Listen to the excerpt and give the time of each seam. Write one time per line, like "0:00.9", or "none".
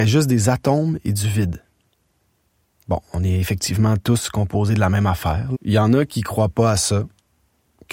0:05.5